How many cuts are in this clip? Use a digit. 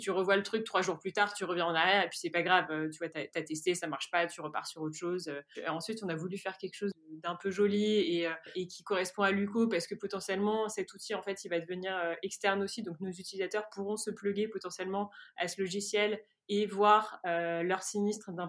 1